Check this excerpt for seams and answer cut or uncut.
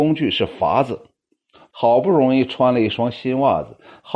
cut